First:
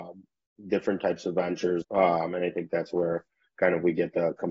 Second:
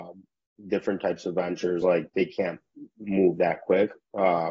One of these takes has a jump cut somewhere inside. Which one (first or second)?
first